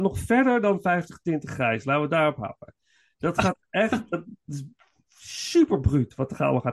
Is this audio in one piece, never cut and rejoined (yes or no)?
yes